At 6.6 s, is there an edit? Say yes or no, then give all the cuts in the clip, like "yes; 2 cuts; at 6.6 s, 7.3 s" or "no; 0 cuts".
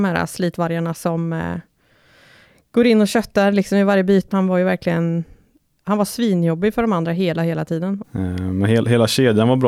no; 2 cuts; at 4.3 s, 8.0 s